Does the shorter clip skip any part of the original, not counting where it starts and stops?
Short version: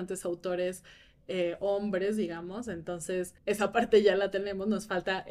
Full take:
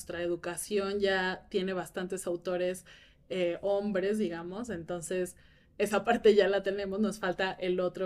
yes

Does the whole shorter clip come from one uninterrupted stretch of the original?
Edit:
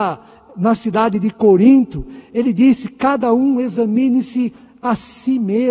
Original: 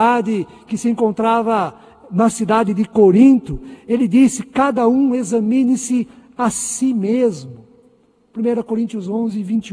yes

